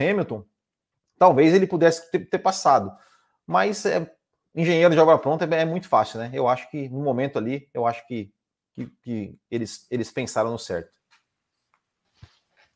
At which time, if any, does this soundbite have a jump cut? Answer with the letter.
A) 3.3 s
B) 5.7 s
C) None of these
C